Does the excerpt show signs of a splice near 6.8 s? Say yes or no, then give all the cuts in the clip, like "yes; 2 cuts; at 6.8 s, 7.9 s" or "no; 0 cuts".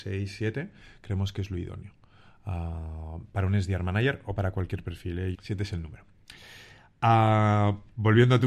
no; 1 cut; at 5.3 s